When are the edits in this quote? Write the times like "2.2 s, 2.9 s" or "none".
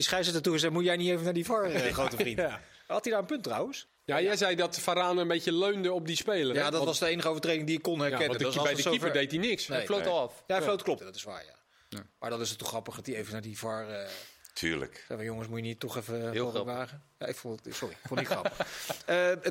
3.9 s, 11.0 s